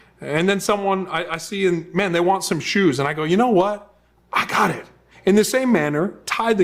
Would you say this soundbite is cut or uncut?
cut